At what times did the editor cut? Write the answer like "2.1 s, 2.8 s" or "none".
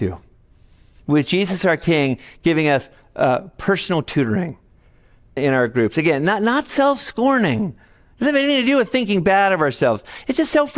5.4 s